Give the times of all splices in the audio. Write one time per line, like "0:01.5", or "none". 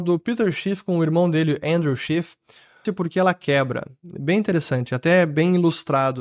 0:02.9